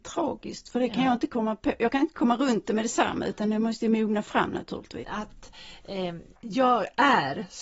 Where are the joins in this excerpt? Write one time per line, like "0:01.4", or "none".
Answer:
0:05.0
0:06.4